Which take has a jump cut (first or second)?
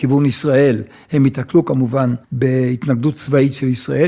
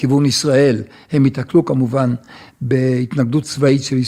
first